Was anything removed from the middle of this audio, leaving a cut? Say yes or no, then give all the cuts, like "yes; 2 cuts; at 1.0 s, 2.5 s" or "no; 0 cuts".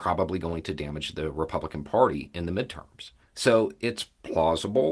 yes; 1 cut; at 3.2 s